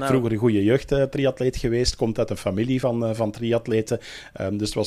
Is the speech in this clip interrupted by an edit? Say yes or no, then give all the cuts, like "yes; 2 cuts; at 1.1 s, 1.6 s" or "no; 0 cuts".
no; 0 cuts